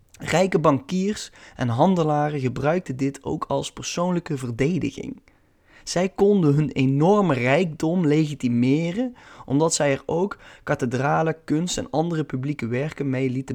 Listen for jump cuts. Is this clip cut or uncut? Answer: uncut